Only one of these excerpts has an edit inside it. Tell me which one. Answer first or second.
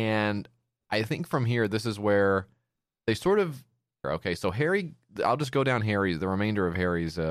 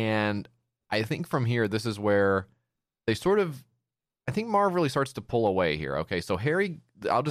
first